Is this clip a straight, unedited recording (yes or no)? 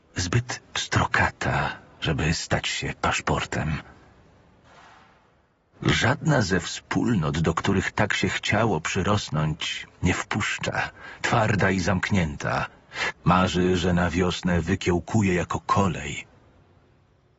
no